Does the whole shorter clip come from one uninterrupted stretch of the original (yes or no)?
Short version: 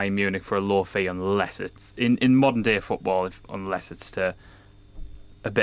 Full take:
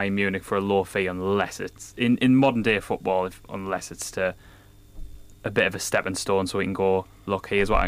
yes